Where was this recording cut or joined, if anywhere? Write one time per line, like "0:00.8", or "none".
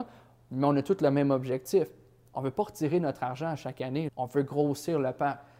0:04.1